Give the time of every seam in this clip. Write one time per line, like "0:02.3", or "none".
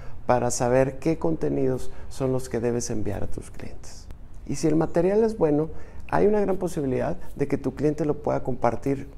0:04.4